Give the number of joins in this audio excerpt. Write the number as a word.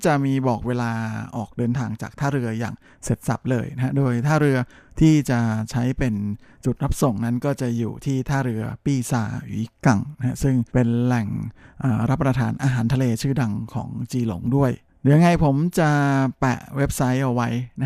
one